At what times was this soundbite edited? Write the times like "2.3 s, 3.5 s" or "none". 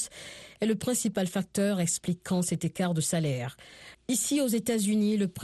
3.9 s